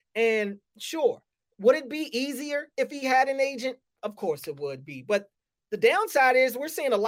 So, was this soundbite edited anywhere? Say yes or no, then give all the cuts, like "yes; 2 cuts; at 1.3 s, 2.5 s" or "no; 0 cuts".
no; 0 cuts